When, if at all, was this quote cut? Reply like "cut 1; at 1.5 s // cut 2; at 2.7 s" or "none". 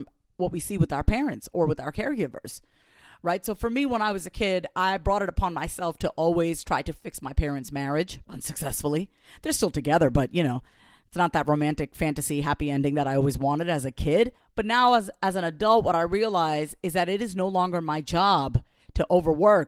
none